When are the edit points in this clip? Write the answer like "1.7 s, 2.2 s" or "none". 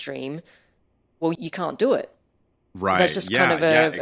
1.4 s